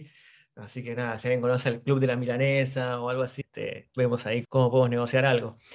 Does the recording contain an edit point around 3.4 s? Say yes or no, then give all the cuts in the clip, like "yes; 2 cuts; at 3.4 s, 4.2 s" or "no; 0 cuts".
yes; 2 cuts; at 3.4 s, 4.4 s